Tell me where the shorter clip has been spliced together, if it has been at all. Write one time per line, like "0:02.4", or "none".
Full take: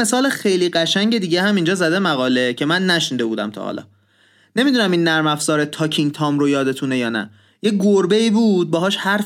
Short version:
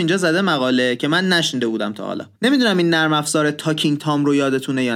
0:02.3